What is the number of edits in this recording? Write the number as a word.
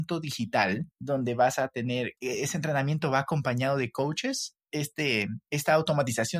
three